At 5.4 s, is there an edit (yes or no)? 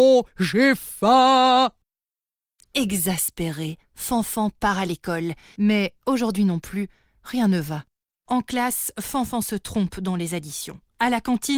no